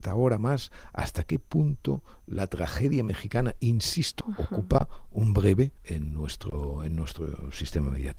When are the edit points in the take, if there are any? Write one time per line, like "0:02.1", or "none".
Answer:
0:04.2
0:05.8

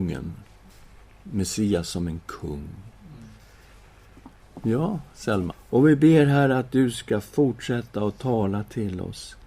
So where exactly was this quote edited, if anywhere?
0:04.4
0:05.5

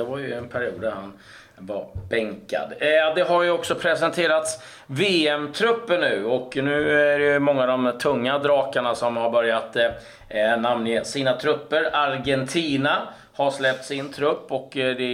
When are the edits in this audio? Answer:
none

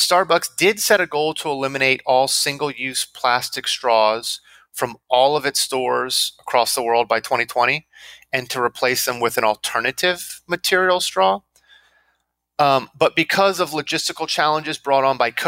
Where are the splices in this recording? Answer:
none

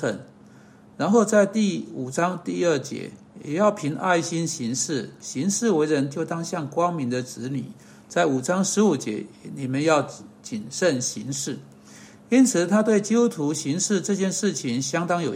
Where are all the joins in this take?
0:05.2

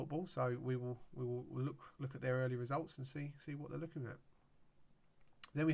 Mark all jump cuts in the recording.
0:01.9

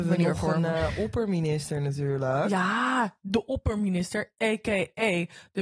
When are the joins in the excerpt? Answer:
none

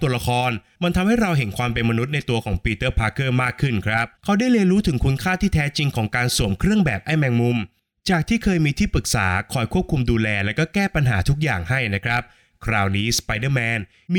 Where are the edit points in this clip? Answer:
0:04.1

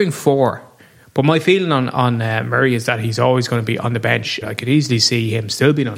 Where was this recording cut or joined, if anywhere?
0:04.4

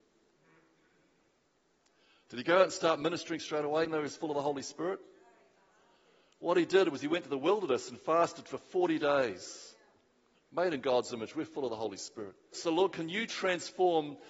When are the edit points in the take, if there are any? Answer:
0:03.8
0:10.3
0:12.5

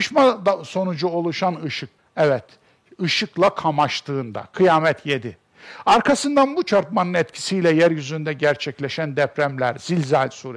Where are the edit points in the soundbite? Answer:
0:02.0

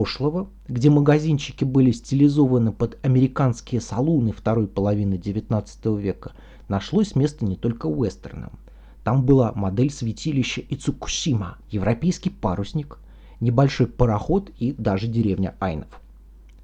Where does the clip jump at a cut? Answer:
0:11.6

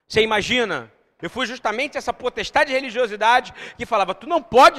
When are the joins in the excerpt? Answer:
0:01.2

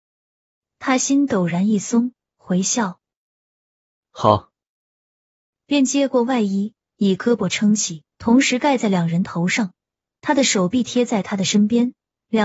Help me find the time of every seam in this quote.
none

